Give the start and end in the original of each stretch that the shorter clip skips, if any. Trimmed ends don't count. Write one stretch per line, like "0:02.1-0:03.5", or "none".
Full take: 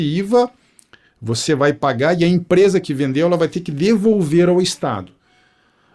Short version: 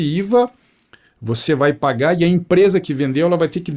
none